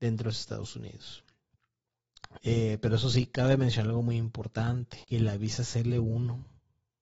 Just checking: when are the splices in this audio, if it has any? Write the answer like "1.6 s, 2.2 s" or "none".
2.4 s, 5.0 s